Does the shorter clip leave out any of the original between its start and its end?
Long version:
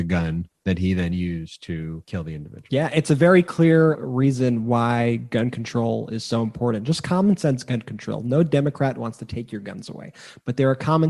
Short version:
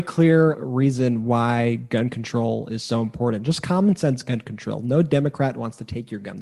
no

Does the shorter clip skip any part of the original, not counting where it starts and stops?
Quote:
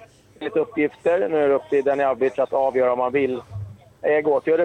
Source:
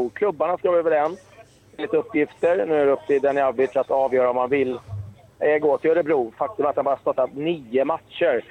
no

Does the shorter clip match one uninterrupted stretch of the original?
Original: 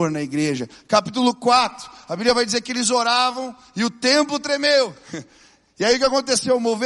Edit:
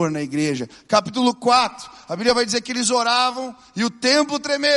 yes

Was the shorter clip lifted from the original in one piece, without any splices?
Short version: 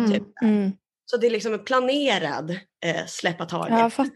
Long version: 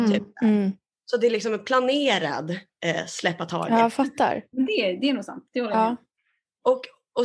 yes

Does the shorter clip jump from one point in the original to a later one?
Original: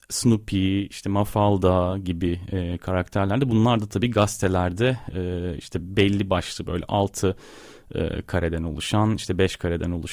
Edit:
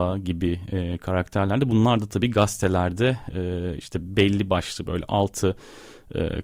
no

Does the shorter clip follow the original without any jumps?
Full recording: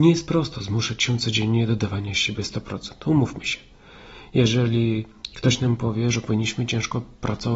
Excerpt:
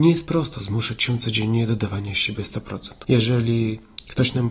no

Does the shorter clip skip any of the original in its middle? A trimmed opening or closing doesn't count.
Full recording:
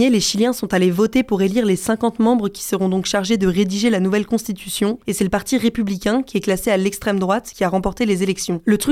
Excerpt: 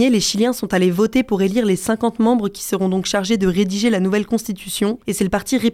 no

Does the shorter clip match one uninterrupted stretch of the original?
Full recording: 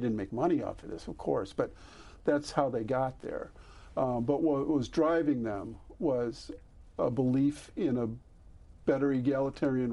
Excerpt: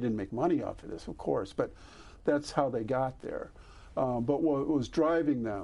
yes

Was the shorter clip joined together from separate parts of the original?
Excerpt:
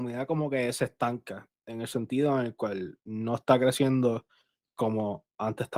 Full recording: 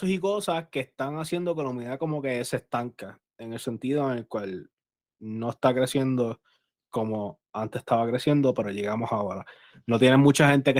yes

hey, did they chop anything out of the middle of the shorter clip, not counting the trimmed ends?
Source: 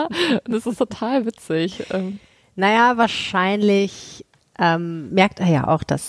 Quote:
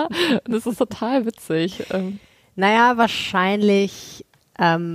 no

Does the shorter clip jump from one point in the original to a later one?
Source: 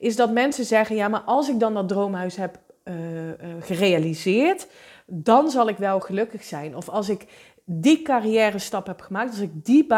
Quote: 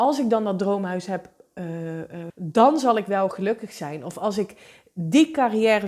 yes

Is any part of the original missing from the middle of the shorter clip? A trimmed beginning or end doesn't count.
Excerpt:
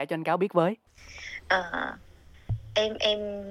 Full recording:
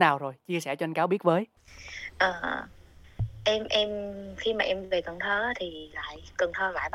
no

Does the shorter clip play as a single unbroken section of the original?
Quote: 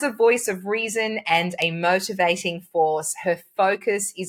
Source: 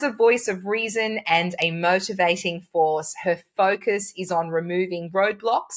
yes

